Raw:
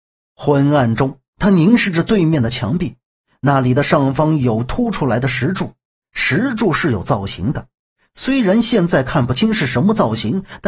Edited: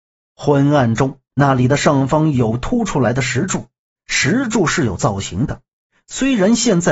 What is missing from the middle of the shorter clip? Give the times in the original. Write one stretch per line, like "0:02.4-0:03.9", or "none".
0:01.3-0:03.4